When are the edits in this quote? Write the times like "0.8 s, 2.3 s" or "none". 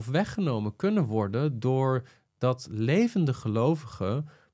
none